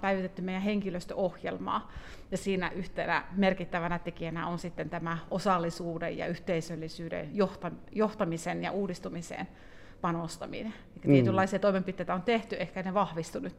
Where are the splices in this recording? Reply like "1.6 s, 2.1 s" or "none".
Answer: none